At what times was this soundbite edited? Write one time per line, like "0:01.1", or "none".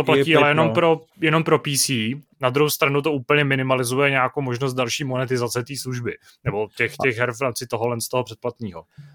0:02.3